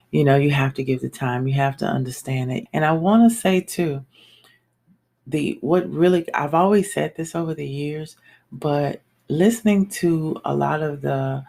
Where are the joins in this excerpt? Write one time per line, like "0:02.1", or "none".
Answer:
0:02.7